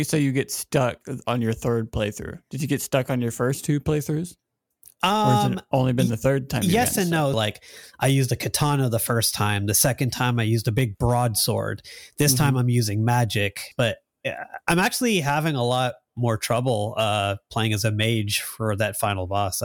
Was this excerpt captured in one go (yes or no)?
no